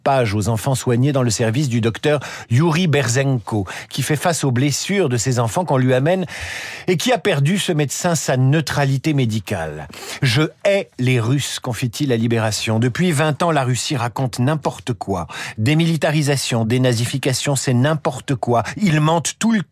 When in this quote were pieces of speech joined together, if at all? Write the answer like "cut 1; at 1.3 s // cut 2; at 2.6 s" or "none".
none